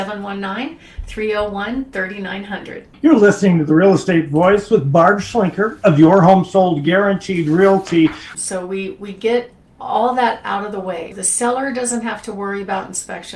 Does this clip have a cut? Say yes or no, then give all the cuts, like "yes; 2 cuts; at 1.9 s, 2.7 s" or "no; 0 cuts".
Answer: yes; 3 cuts; at 2.9 s, 8.3 s, 11.1 s